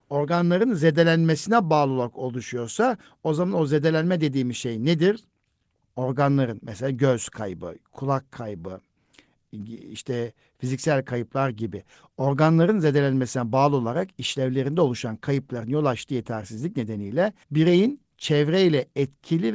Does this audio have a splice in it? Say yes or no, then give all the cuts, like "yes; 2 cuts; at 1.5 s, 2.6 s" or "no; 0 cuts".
yes; 2 cuts; at 5.8 s, 17.4 s